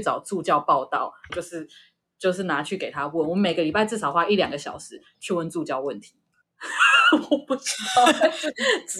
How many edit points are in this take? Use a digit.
2